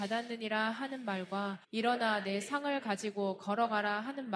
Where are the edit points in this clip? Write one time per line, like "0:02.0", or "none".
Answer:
0:01.6